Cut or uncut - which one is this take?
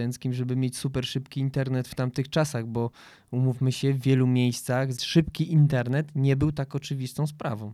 cut